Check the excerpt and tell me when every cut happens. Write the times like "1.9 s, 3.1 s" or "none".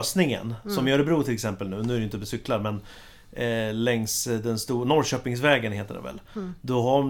none